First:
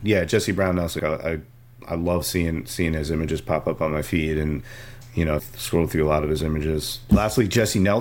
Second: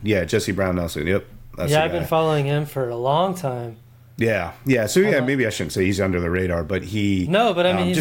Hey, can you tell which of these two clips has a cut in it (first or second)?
first